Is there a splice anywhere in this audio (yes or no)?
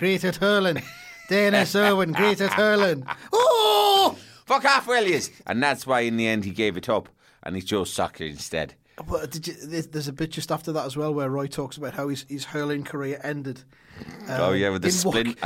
no